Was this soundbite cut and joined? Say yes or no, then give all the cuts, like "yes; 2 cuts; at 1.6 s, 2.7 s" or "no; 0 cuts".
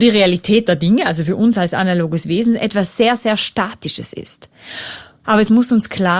yes; 1 cut; at 5.2 s